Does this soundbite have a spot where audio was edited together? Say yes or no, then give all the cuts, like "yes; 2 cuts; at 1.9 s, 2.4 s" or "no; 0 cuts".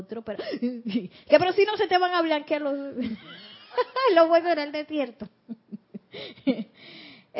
no; 0 cuts